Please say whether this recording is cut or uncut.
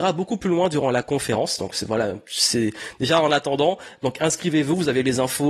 uncut